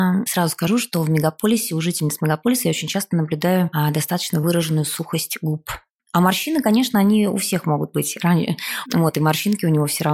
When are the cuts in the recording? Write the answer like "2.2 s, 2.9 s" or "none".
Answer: 6.0 s, 8.9 s

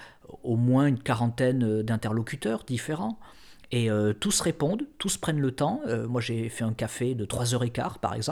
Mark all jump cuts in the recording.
none

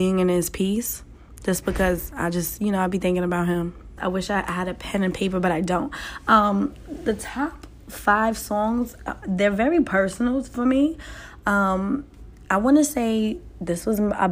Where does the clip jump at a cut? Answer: 4.0 s

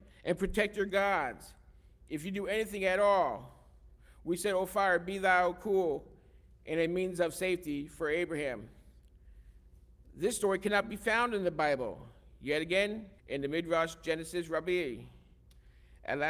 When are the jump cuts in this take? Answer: 13.2 s

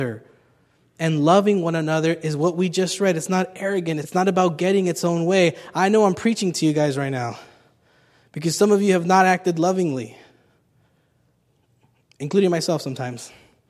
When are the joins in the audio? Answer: 4.0 s

